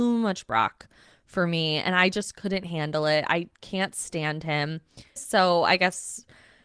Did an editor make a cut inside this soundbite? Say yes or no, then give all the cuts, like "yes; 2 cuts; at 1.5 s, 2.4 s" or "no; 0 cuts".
yes; 1 cut; at 5.2 s